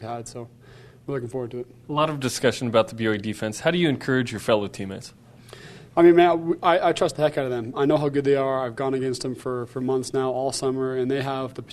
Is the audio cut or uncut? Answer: uncut